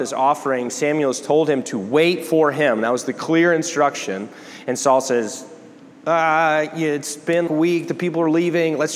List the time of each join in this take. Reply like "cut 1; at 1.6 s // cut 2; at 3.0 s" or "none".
cut 1; at 7.5 s